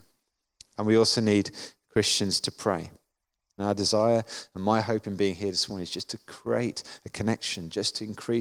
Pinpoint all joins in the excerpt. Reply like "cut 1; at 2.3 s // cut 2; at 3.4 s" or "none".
cut 1; at 3.6 s